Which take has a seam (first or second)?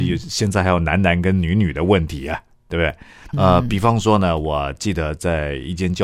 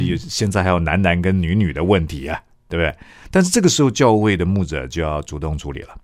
first